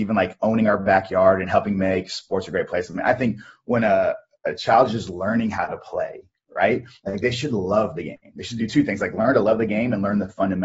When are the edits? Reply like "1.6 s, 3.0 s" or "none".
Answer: none

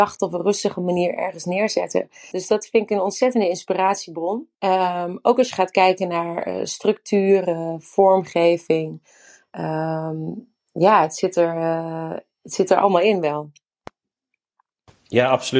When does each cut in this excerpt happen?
2.3 s, 4.5 s

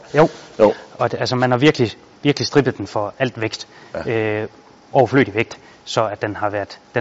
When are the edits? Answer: none

